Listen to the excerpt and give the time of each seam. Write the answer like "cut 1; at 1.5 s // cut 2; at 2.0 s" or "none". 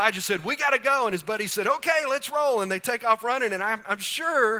none